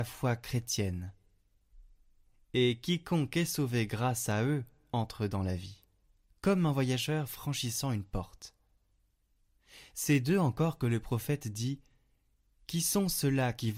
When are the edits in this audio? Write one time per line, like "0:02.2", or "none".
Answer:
none